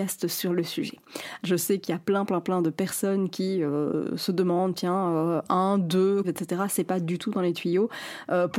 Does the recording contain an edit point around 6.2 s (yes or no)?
yes